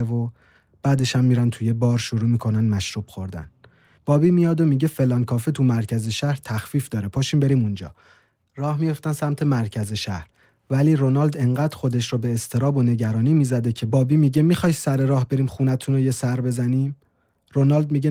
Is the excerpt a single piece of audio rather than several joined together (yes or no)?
no